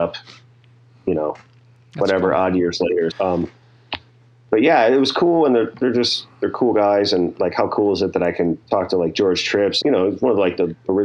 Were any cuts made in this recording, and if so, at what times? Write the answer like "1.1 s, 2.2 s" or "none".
3.1 s, 8.6 s, 9.8 s